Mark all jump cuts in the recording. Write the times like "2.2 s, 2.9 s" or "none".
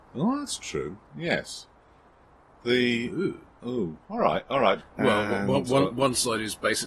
1.1 s, 4.8 s